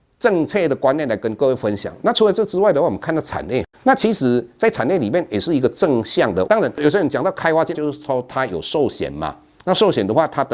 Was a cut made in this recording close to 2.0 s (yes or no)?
no